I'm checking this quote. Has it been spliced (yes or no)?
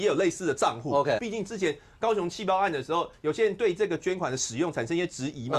yes